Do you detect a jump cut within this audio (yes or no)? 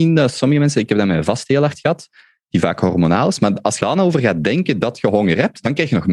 yes